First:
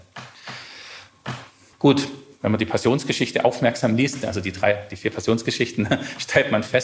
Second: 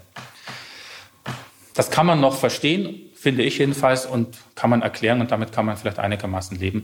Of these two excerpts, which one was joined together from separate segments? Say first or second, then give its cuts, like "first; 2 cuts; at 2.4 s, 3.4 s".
first; 1 cut; at 1.7 s